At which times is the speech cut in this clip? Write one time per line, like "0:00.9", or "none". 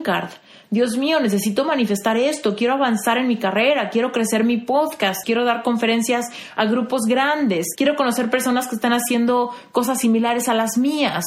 0:05.2
0:07.8